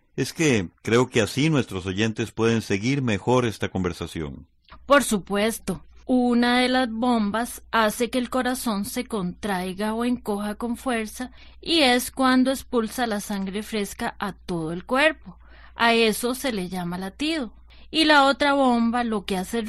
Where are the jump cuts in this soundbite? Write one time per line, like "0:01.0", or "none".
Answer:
0:06.0